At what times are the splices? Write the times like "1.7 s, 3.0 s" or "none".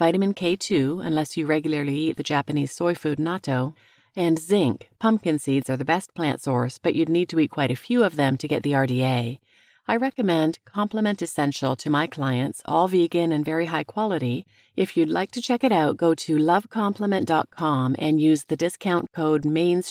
none